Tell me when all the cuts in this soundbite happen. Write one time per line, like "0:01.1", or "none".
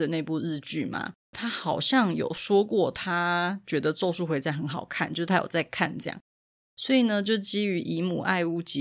0:01.3